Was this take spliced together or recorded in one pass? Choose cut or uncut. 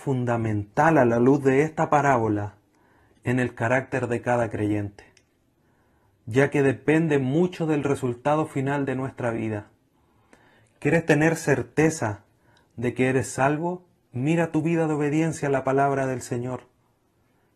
uncut